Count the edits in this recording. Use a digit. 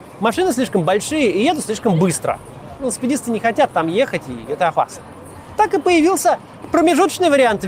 0